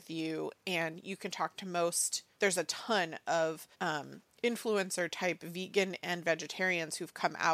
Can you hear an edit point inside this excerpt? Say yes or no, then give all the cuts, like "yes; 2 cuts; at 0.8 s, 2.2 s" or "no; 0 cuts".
yes; 2 cuts; at 2.3 s, 3.7 s